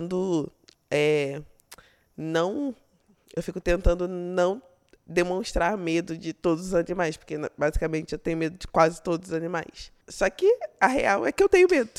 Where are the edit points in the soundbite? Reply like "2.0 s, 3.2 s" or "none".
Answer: none